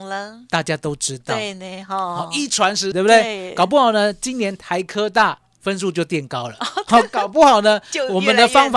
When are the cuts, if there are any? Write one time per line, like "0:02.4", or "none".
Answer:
0:02.9